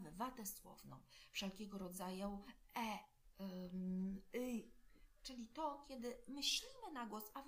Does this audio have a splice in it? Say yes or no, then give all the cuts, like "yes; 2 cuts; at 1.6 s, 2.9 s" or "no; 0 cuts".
no; 0 cuts